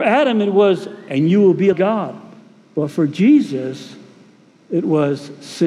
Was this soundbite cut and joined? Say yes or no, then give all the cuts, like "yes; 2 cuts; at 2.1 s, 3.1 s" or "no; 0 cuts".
yes; 1 cut; at 1.7 s